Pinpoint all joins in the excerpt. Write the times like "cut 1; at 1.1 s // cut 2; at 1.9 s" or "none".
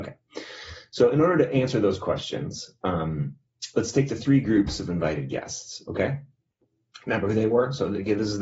none